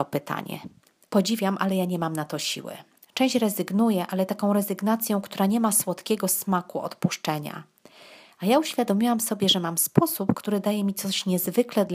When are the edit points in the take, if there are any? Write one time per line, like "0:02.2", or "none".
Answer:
0:01.1